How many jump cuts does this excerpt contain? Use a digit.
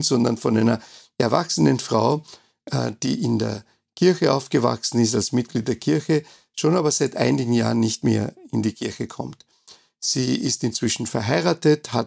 0